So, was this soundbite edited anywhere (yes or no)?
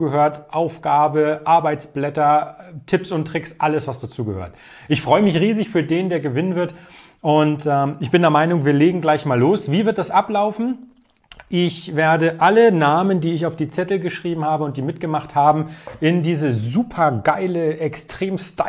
no